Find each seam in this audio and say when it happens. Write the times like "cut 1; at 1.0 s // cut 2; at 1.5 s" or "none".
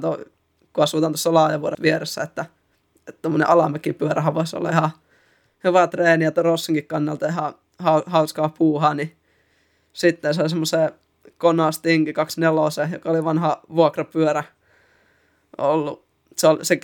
cut 1; at 1.7 s